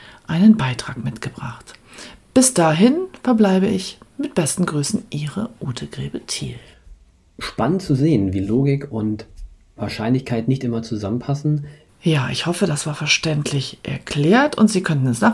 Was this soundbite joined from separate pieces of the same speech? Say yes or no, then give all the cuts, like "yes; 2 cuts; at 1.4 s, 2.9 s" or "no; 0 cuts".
yes; 1 cut; at 11.9 s